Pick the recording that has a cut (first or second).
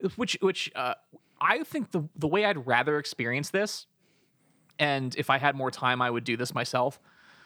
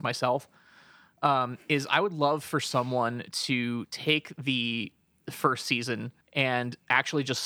second